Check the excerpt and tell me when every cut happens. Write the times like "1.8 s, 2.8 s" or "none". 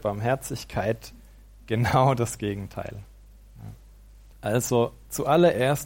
4.3 s